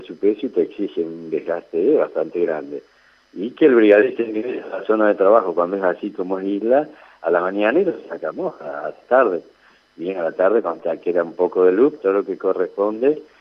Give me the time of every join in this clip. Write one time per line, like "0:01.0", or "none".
0:12.0